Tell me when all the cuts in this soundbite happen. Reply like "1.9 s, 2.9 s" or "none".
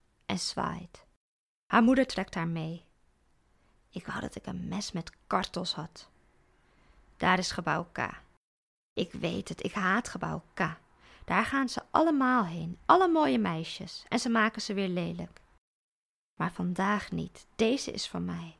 none